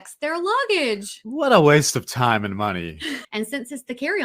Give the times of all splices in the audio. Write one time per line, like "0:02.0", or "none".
0:03.2